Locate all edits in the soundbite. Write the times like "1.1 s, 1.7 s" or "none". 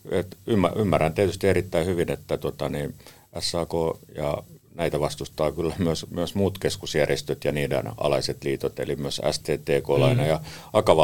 none